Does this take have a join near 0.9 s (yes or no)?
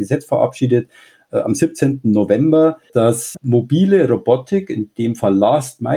no